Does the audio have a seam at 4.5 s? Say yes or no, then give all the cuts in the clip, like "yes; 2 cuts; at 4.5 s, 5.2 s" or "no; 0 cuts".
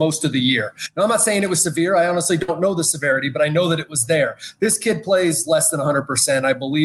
no; 0 cuts